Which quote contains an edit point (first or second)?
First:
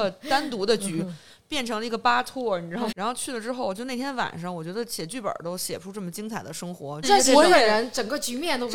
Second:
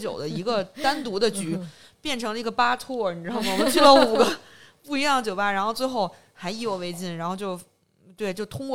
first